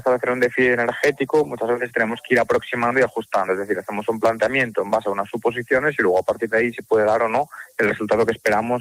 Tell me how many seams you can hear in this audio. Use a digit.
0